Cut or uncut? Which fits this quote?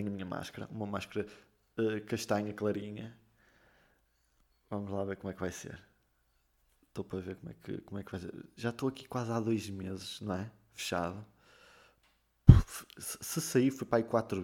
uncut